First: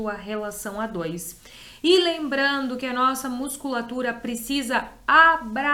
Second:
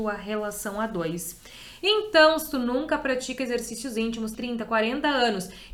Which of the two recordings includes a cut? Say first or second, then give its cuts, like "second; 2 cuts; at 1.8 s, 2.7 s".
second; 2 cuts; at 1.8 s, 4.3 s